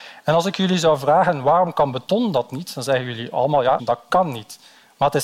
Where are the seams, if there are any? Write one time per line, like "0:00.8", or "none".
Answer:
0:03.8